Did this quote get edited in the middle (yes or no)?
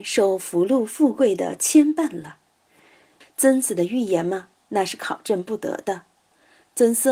yes